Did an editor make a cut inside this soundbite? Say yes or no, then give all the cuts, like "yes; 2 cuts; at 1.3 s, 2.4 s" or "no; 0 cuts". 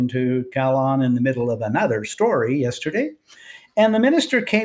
no; 0 cuts